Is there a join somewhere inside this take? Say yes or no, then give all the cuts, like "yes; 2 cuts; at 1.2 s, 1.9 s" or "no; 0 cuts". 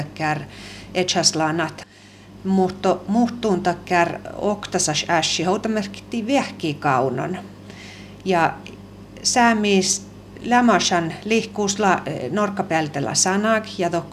no; 0 cuts